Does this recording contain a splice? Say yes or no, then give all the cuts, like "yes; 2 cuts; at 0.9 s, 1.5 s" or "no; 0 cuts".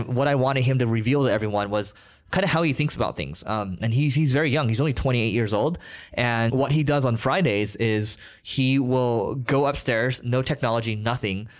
no; 0 cuts